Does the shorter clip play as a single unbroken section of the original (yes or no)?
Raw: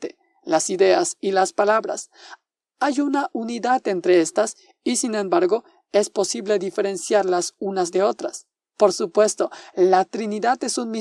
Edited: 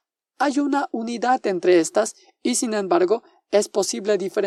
yes